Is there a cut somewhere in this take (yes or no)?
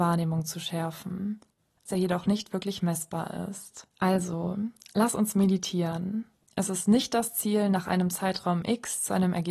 yes